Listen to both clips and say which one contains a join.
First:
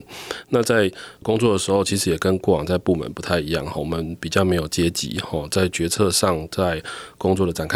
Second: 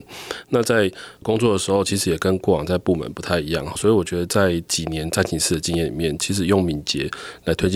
second; 1 cut; at 3.7 s

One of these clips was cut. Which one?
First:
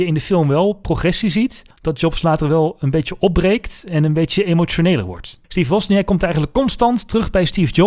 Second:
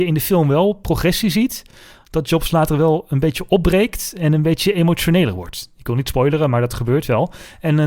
first; 2 cuts; at 1.7 s, 5.4 s

